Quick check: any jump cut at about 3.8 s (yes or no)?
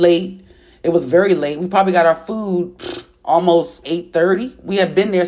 yes